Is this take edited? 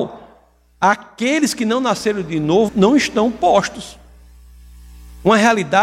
yes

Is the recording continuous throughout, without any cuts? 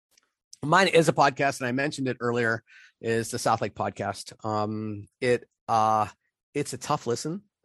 yes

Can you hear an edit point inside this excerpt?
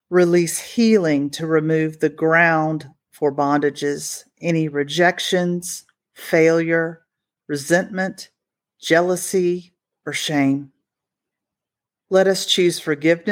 no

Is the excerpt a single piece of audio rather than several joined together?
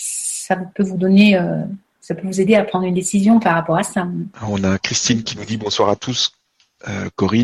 no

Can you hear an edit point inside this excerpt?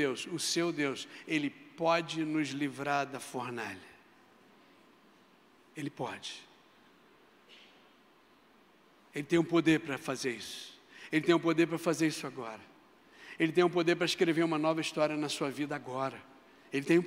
no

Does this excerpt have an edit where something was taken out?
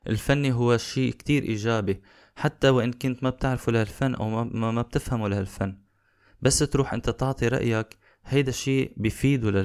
no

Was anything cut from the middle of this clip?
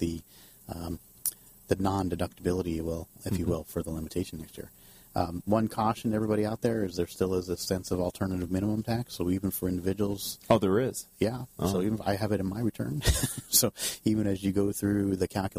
no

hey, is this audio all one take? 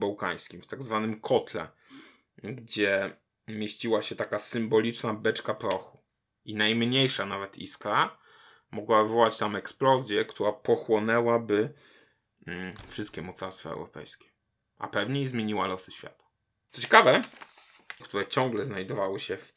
no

